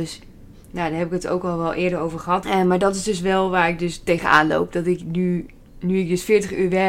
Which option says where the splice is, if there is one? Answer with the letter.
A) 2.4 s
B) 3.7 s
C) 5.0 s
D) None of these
A